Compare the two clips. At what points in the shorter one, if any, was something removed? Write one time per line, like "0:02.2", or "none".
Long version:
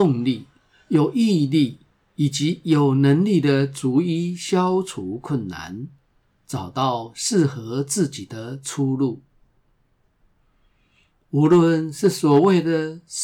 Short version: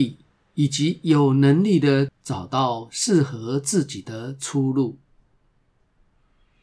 0:02.1